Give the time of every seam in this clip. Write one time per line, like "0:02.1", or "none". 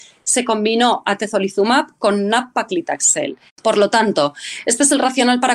0:03.5